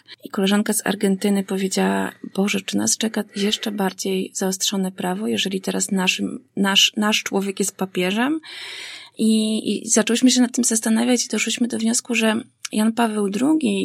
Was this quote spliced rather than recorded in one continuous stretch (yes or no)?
no